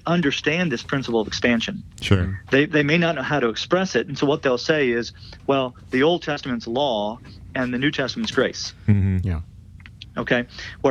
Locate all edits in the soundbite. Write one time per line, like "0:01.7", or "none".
none